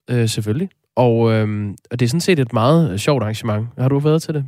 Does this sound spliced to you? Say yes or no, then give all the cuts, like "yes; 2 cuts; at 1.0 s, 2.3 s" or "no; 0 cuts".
no; 0 cuts